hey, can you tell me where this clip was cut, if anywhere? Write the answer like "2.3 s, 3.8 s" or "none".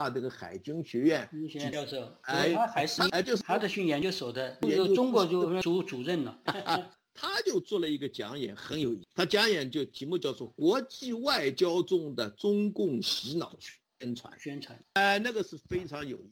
6.5 s